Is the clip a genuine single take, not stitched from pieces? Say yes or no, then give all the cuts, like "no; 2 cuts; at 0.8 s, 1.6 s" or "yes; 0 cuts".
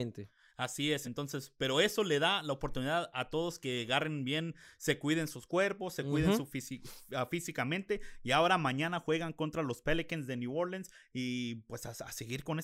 yes; 0 cuts